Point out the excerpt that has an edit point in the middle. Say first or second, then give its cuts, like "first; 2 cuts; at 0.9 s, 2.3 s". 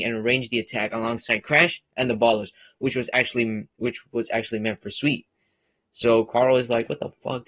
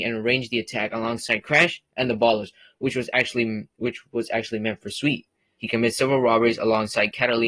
second; 1 cut; at 5.6 s